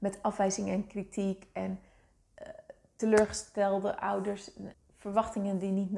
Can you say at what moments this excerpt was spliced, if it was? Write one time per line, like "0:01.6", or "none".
0:04.7